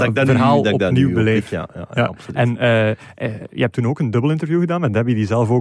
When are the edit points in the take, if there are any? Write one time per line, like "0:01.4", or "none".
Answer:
none